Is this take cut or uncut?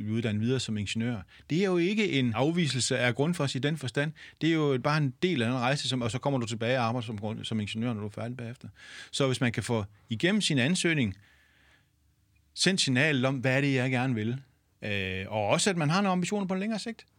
uncut